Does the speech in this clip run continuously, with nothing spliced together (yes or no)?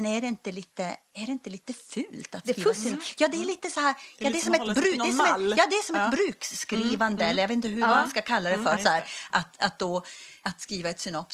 no